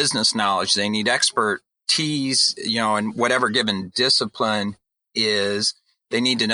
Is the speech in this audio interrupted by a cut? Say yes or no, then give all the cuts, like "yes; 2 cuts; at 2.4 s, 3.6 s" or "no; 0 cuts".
no; 0 cuts